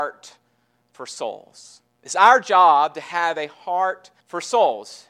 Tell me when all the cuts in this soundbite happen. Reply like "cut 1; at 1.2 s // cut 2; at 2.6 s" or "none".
cut 1; at 4.2 s